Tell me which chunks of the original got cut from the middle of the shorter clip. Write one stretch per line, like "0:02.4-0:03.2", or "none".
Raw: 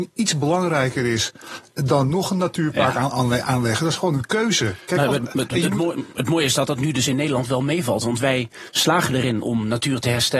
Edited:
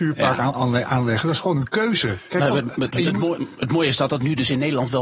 none